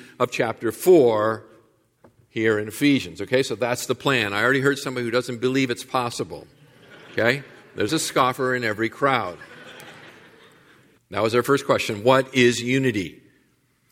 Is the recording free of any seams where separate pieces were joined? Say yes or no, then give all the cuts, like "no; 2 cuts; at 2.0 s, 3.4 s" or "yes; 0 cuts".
no; 2 cuts; at 7.9 s, 11.0 s